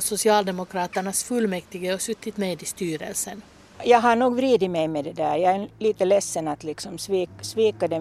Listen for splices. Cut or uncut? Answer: cut